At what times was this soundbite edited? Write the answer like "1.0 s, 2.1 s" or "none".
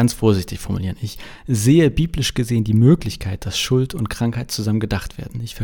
none